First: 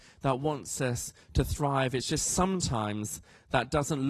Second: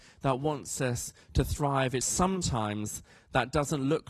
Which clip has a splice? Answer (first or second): second